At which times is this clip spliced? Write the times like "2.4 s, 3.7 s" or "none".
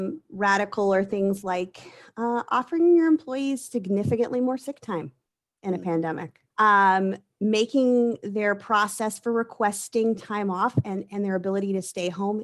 6.5 s